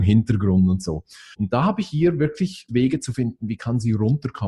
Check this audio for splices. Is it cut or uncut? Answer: cut